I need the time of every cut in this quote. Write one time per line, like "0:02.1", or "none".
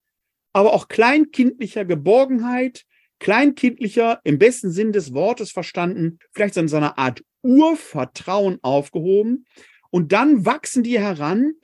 0:06.2